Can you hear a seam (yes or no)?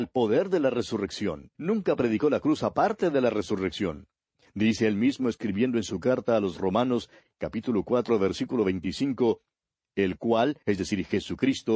yes